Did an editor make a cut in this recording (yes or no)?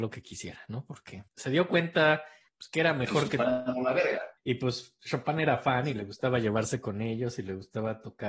yes